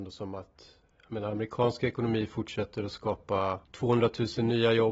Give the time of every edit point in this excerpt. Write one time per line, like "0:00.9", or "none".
0:03.6